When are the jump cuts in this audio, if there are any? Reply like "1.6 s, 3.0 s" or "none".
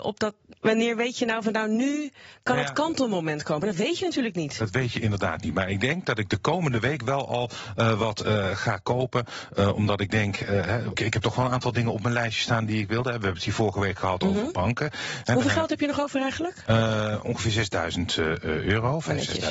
10.9 s